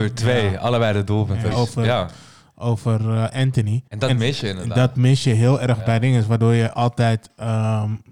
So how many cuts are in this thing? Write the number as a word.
two